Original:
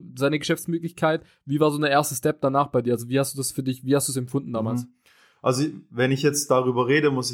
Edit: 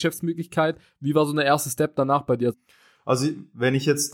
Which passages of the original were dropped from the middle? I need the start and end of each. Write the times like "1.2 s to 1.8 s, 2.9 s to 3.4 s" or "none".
3.0 s to 4.9 s